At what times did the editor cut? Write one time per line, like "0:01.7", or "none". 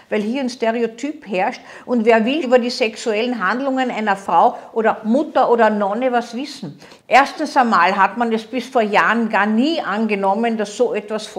0:02.4
0:07.0